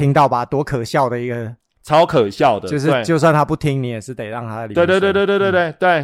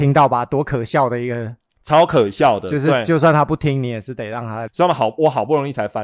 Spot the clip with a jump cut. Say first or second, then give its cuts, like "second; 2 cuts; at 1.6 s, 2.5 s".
second; 1 cut; at 4.7 s